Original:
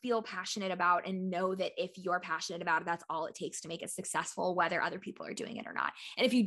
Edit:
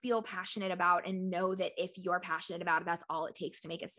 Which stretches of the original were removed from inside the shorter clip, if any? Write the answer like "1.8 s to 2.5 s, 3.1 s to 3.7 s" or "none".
none